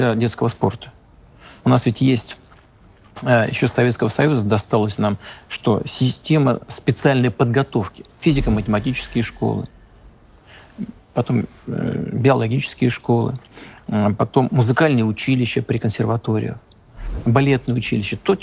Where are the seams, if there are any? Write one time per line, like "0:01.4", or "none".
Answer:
0:01.6